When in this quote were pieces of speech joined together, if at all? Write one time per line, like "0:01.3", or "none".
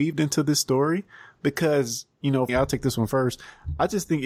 0:02.5